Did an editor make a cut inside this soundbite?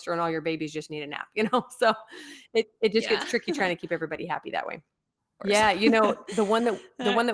yes; 1 cut; at 5.4 s

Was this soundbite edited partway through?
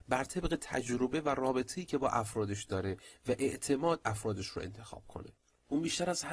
no; 0 cuts

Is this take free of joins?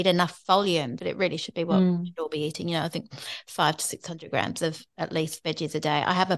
no; 1 cut; at 1.0 s

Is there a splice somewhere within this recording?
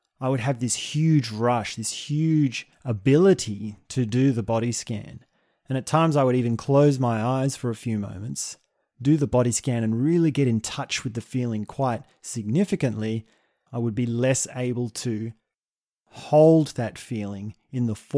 yes; 1 cut; at 13.7 s

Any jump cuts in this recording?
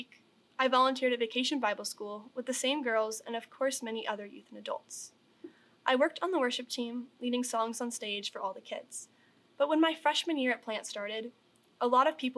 yes; 1 cut; at 9.5 s

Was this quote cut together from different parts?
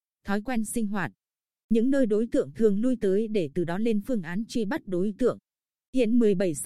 no; 0 cuts

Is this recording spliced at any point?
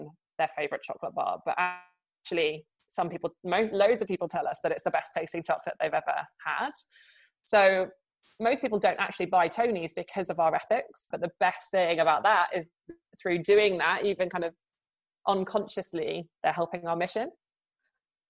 yes; 1 cut; at 11.1 s

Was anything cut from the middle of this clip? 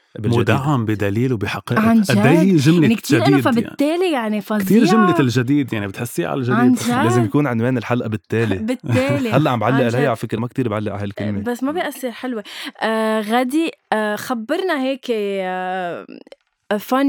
yes; 1 cut; at 10.4 s

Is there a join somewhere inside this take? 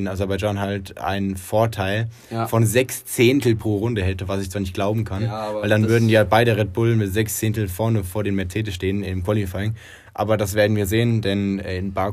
yes; 1 cut; at 10.1 s

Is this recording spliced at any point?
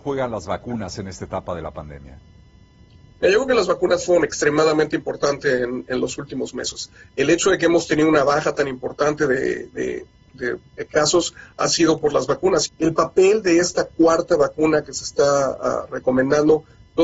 yes; 1 cut; at 12.7 s

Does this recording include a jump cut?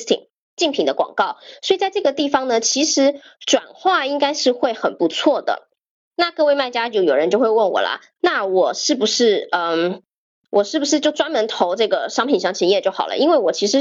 no; 0 cuts

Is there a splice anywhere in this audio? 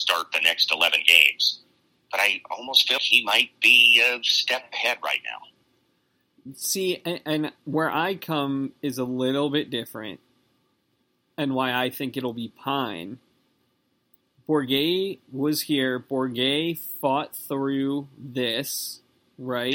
yes; 1 cut; at 3.0 s

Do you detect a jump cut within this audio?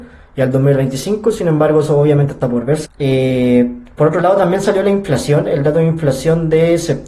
yes; 1 cut; at 2.8 s

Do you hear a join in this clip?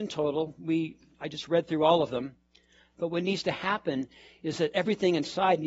yes; 1 cut; at 2.9 s

